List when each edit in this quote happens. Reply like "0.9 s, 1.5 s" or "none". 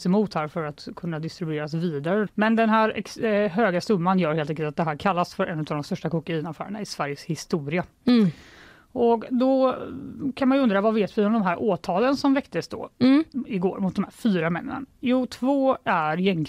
2.3 s